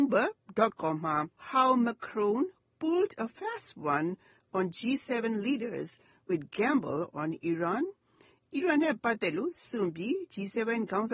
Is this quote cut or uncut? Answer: cut